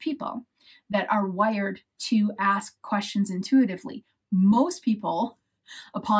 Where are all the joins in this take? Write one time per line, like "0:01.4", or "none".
none